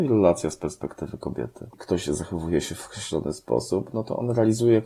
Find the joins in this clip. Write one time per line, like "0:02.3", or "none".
0:01.7

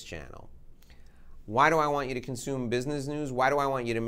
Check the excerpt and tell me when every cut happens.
0:01.4

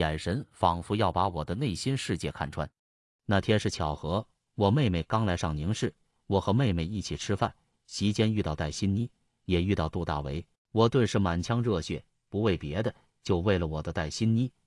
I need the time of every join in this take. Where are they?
0:10.6
0:12.1

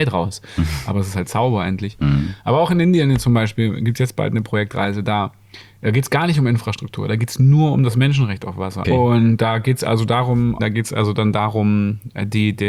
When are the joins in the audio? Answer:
0:08.8
0:10.6

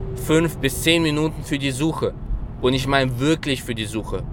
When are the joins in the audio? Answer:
none

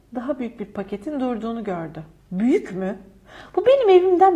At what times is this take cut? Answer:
0:02.2

